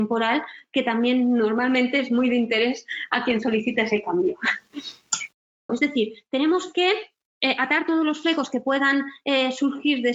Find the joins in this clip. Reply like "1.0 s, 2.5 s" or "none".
5.7 s